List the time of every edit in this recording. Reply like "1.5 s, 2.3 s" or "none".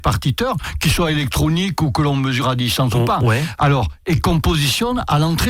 3.6 s